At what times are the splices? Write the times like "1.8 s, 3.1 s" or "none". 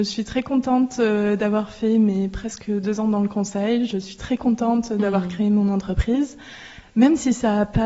none